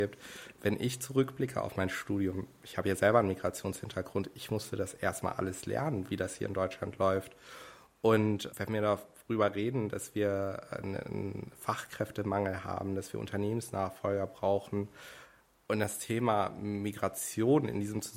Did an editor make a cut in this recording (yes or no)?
yes